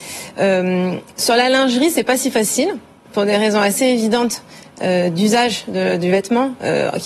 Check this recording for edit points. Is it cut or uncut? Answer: cut